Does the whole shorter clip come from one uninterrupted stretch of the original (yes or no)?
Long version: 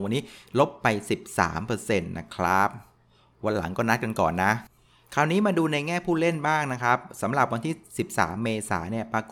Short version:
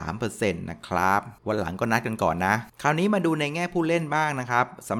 no